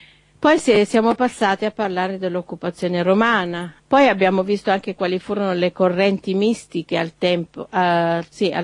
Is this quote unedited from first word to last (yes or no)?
no